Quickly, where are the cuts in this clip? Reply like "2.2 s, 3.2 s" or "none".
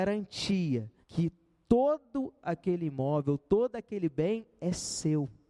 1.0 s